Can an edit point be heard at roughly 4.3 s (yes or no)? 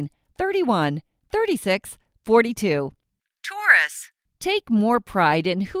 yes